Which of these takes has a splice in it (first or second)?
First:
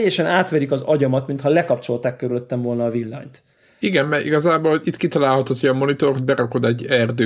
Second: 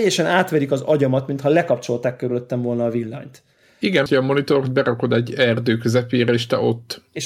second